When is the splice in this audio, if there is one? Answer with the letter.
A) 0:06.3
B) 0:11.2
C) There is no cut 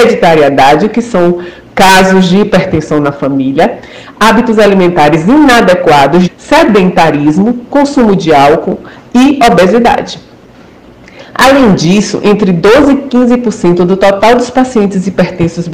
A